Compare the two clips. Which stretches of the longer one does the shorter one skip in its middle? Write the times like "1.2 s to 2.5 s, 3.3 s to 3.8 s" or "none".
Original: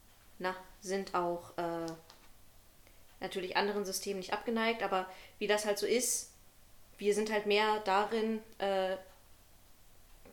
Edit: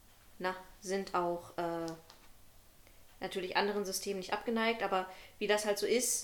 none